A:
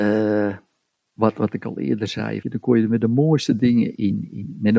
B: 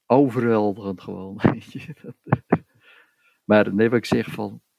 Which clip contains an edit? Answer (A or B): A